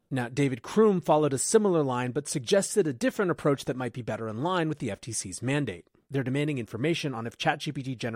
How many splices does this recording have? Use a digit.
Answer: 1